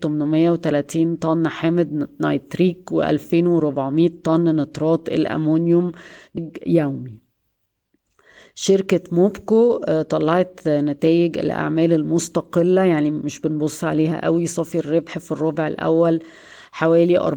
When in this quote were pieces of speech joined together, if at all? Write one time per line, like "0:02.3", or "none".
0:06.4